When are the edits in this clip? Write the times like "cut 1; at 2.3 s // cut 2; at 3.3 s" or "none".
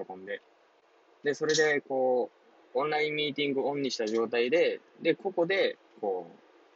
none